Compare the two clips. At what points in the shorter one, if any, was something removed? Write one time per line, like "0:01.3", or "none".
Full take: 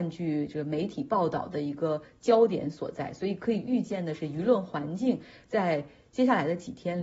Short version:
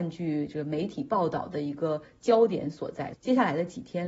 0:03.1